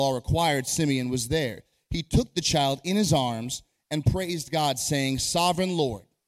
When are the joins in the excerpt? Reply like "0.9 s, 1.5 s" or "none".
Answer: none